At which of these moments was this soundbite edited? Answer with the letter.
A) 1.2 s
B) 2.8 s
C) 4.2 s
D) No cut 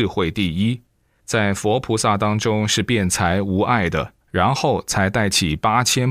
C